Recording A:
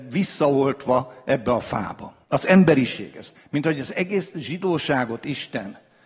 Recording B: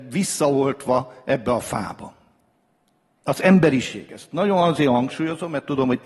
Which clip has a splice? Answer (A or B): A